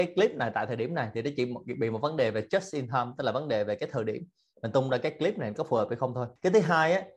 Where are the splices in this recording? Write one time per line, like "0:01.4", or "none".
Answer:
none